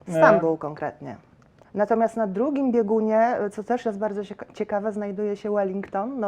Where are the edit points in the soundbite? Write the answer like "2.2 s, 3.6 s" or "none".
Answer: 1.6 s

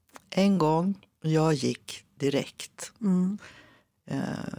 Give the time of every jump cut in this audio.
1.2 s

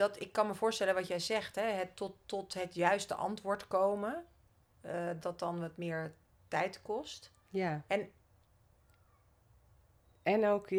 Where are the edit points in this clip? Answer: 5.2 s, 7.9 s

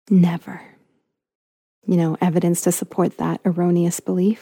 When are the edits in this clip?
1.8 s

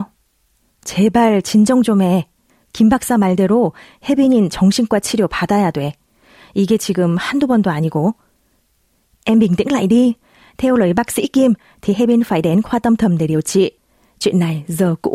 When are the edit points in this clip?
none

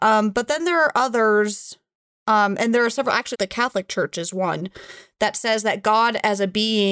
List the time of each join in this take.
3.3 s

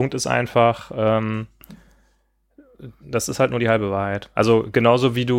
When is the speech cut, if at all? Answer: 3.0 s

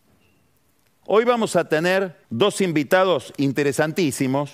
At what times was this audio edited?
1.0 s, 2.2 s

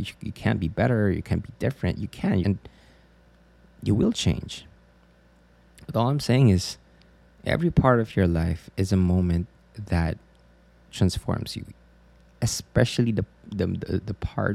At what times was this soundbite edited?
2.4 s

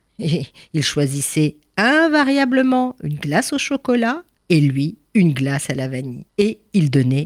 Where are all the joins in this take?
none

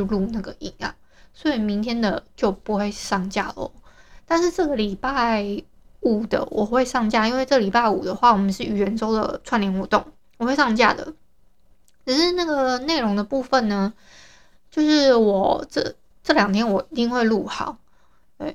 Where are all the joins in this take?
none

